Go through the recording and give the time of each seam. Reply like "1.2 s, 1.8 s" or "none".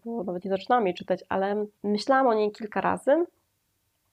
1.7 s